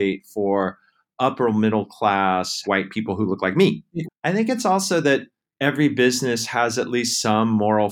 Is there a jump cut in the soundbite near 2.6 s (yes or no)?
yes